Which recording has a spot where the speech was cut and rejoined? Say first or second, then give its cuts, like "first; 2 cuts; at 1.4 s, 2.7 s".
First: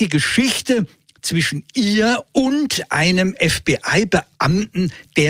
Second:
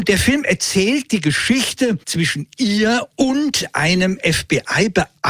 second; 1 cut; at 2.0 s